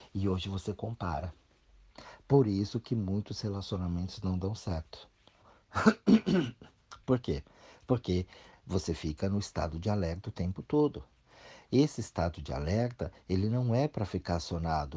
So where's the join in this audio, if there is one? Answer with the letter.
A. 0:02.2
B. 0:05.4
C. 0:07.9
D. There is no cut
B